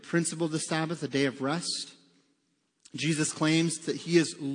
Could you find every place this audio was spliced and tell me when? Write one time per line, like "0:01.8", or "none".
none